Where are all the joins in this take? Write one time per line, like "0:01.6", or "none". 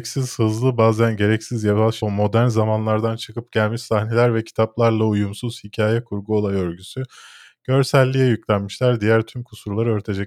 0:02.0

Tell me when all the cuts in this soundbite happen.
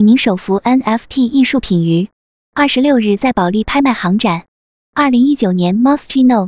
0:04.8

